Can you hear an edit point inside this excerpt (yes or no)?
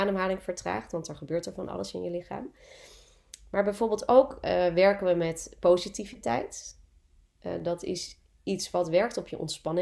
no